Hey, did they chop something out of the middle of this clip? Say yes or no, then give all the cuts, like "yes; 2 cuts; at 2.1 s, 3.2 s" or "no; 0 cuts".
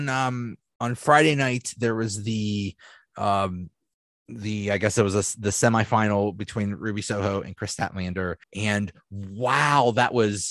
yes; 1 cut; at 8.4 s